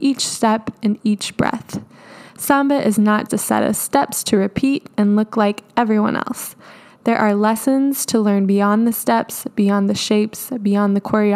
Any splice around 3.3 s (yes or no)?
yes